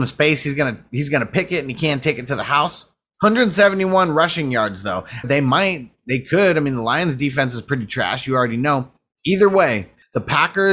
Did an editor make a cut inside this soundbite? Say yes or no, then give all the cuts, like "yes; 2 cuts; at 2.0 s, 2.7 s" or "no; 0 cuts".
yes; 1 cut; at 5.2 s